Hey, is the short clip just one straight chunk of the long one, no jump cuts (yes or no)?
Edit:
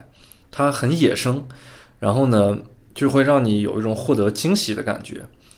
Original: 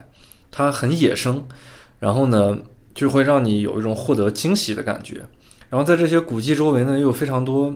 yes